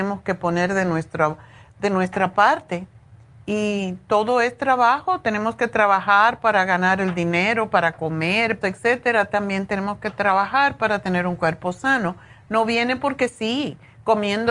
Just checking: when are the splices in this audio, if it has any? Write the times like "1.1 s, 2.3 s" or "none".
8.6 s